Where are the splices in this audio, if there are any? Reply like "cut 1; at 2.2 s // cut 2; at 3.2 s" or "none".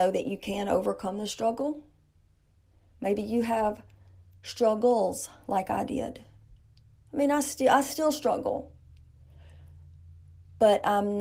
none